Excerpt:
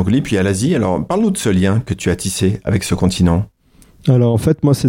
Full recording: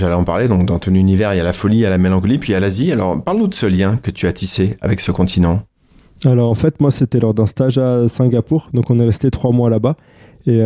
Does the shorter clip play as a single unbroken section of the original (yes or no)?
yes